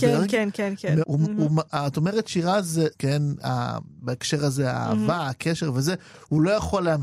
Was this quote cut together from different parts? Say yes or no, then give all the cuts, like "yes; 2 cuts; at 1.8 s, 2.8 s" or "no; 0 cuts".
yes; 2 cuts; at 1.0 s, 2.9 s